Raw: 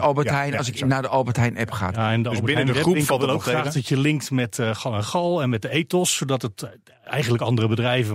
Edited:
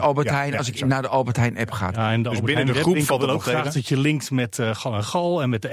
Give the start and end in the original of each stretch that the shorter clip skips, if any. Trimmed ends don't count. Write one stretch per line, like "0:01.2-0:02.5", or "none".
none